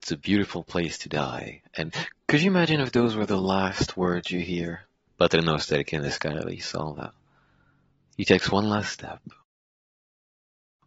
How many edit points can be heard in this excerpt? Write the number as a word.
one